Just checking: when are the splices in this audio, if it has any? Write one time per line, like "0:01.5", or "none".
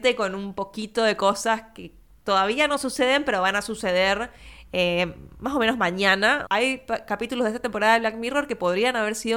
0:06.4